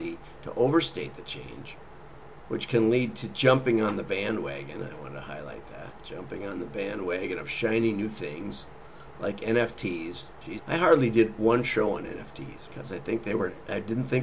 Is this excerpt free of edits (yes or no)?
no